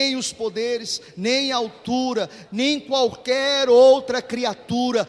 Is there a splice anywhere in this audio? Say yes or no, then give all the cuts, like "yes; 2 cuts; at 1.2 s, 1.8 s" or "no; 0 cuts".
yes; 1 cut; at 2.4 s